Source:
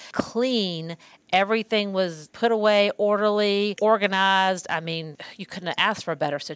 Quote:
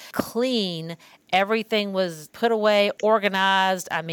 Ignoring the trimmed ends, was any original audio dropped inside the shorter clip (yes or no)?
yes